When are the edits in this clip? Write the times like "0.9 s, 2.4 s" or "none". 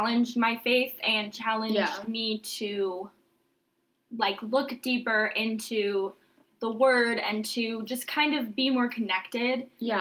none